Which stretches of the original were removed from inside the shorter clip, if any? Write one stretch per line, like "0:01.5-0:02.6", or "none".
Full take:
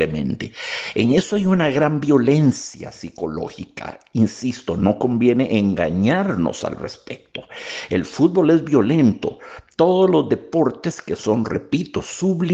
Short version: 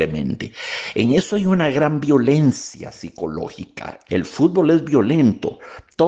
0:04.1-0:07.9